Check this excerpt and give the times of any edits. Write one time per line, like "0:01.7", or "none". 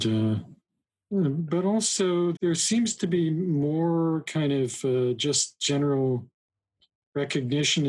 0:02.4